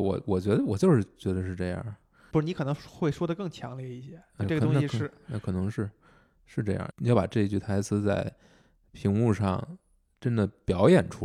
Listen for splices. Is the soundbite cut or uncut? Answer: cut